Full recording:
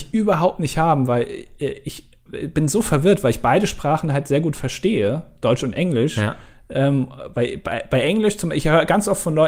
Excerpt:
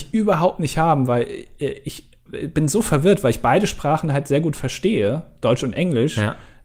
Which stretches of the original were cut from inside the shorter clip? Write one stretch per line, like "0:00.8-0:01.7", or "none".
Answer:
none